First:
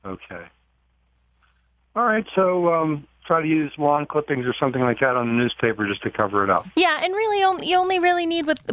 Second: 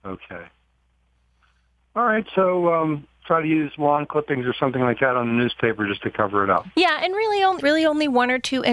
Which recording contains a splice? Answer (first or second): second